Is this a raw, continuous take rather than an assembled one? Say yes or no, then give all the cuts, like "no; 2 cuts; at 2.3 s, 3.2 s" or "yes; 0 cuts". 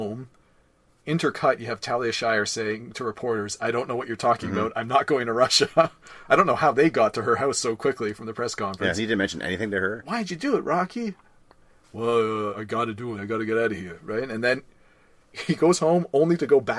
no; 1 cut; at 13.2 s